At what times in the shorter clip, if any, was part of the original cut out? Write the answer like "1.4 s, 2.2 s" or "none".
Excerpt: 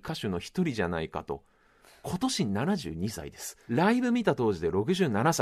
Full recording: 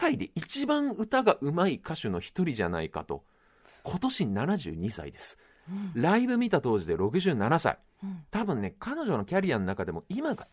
3.7 s